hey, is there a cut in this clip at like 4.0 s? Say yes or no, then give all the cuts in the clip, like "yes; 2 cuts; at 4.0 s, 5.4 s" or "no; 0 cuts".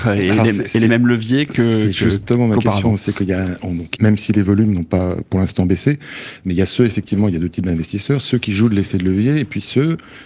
yes; 1 cut; at 4.0 s